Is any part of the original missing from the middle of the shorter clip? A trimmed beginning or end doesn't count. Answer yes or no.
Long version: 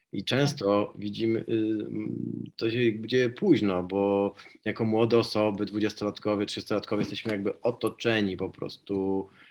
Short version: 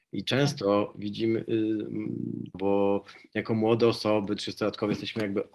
yes